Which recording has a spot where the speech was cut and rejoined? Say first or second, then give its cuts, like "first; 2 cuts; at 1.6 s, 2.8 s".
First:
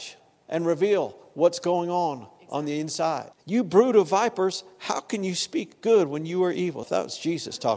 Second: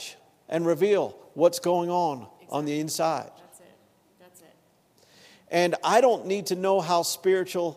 first; 2 cuts; at 3.3 s, 6.8 s